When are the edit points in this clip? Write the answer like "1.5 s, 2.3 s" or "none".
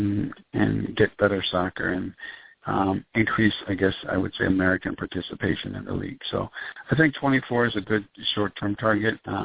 none